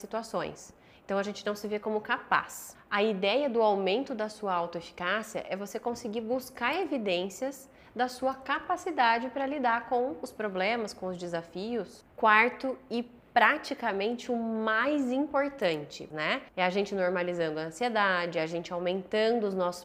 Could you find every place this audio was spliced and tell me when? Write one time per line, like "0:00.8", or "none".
0:16.1